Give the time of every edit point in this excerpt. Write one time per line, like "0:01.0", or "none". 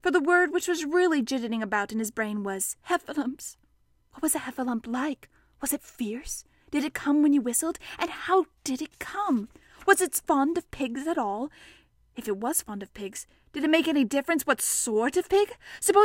0:02.8